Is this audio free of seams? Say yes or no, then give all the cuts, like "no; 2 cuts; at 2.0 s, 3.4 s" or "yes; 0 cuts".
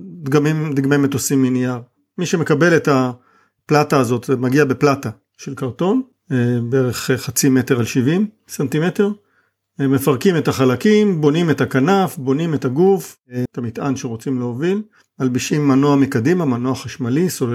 no; 1 cut; at 13.5 s